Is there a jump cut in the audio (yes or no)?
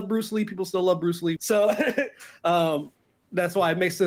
yes